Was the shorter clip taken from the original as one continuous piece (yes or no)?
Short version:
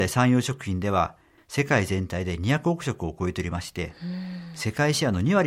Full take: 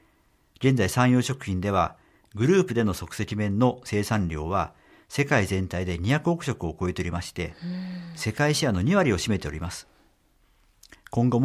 no